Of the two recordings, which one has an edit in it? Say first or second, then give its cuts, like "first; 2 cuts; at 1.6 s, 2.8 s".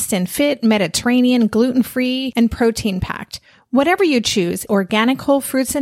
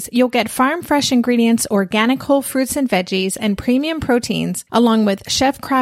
first; 1 cut; at 4.7 s